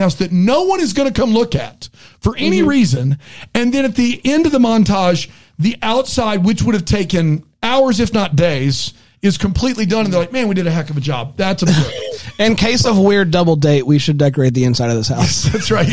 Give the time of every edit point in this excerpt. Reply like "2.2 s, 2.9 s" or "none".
none